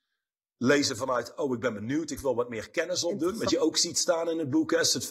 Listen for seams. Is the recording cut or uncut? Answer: cut